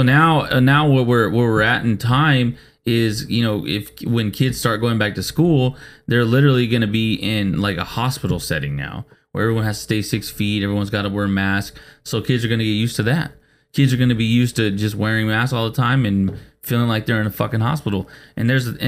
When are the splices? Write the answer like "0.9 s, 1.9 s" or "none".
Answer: none